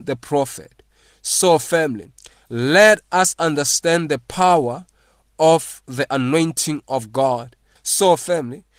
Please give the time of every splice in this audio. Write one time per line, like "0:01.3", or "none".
0:07.8